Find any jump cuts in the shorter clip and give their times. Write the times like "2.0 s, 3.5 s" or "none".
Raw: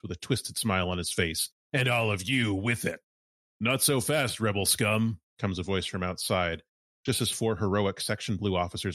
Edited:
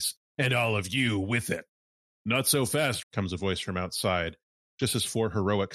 3.0 s